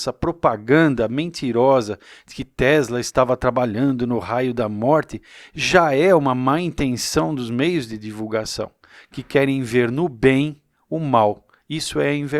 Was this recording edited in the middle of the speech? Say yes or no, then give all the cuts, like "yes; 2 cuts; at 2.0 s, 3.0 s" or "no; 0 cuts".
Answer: no; 0 cuts